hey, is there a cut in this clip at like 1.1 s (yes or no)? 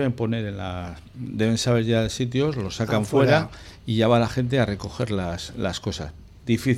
no